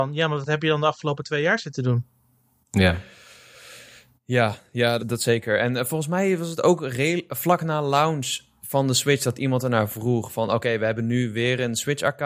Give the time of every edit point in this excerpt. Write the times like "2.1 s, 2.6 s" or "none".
5.0 s